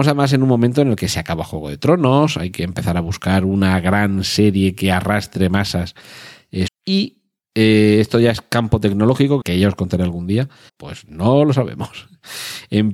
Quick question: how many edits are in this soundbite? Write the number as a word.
three